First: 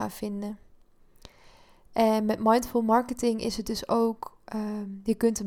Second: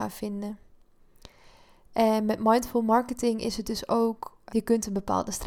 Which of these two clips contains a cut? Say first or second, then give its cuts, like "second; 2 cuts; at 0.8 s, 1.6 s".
second; 1 cut; at 4.5 s